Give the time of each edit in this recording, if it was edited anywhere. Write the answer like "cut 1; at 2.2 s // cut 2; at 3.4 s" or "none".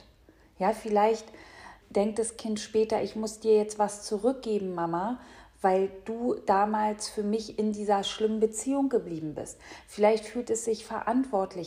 cut 1; at 1.8 s